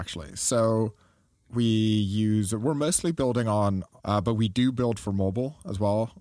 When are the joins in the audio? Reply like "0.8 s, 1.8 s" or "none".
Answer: 4.0 s